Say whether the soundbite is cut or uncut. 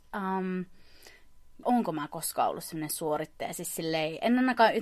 cut